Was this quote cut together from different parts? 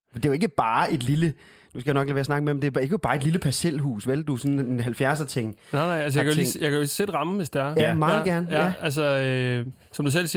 no; 0 cuts

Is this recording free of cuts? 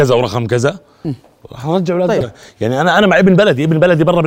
no; 1 cut; at 2.2 s

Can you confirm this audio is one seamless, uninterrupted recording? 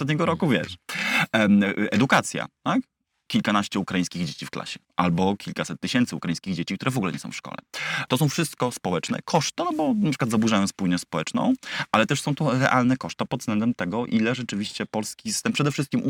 no; 3 cuts; at 4.8 s, 8.1 s, 9.6 s

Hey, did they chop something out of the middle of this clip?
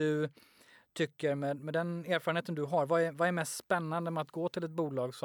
no; 0 cuts

